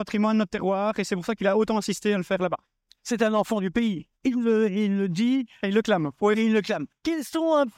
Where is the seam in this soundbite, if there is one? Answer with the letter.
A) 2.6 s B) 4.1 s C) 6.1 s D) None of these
D